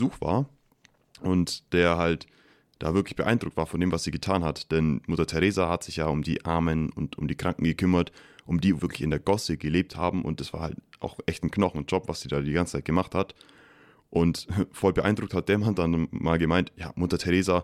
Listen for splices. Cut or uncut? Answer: cut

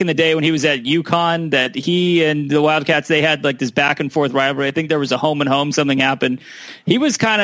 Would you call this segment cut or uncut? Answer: uncut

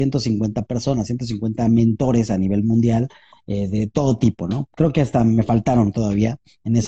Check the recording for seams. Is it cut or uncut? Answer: uncut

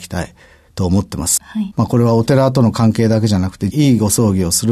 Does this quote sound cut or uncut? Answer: cut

